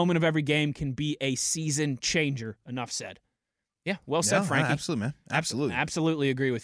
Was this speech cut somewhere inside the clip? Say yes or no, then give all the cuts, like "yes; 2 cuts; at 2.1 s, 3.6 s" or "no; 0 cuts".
yes; 1 cut; at 2.6 s